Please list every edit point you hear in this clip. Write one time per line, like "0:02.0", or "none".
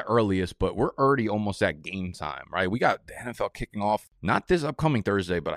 none